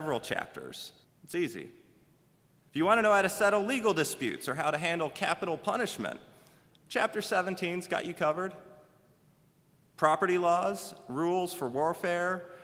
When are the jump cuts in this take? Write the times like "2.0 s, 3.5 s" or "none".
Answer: 1.0 s